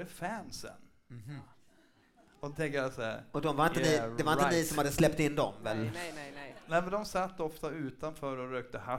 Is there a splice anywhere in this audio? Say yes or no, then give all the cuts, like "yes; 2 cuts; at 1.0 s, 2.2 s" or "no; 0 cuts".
no; 0 cuts